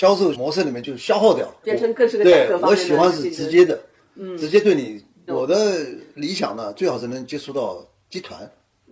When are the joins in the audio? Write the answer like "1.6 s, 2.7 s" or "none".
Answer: 5.3 s